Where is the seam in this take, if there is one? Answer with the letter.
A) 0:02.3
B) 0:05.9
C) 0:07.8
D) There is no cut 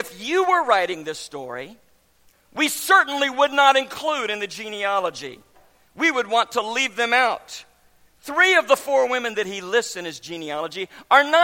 A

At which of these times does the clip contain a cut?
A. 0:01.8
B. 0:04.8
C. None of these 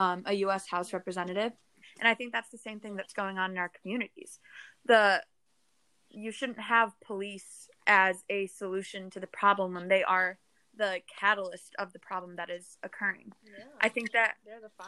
A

